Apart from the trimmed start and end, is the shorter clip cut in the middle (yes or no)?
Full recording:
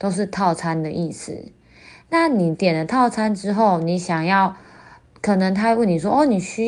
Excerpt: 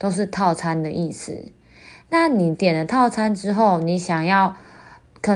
no